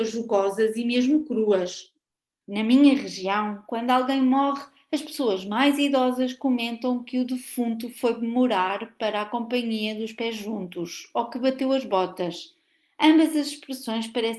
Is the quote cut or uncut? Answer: uncut